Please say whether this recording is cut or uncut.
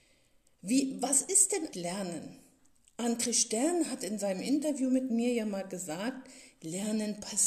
cut